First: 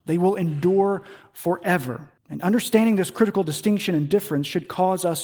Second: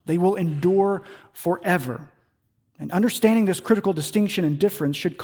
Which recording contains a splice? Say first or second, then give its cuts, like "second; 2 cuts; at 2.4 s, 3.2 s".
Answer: first; 1 cut; at 2.2 s